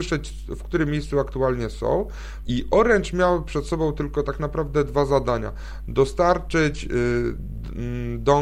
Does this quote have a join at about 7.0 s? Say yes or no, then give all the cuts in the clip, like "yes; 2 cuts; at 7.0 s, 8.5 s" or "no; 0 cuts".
no; 1 cut; at 2.4 s